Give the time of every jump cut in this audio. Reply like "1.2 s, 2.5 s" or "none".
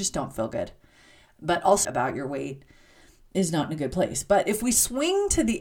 1.8 s